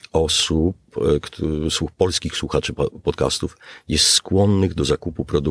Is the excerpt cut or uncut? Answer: uncut